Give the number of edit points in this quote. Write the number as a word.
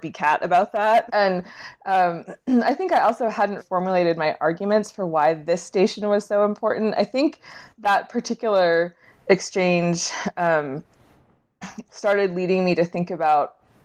three